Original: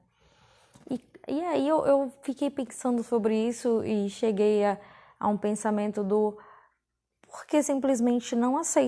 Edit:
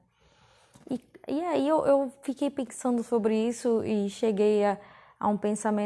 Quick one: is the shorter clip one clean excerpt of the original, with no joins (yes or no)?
yes